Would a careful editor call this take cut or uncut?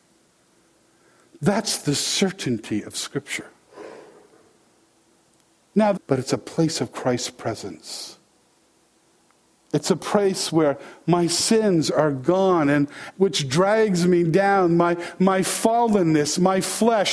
cut